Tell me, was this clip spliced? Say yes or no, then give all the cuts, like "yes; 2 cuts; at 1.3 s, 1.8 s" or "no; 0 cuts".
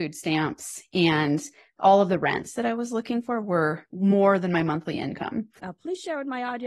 yes; 1 cut; at 5.6 s